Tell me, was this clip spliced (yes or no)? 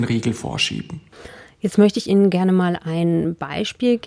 no